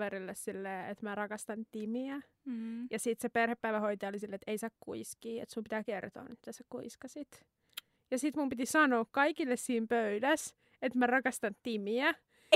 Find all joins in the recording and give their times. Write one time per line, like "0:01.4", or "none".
none